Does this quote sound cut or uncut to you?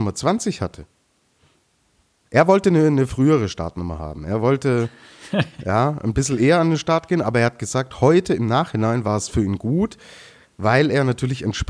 uncut